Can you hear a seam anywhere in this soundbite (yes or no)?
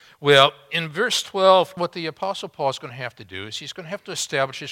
yes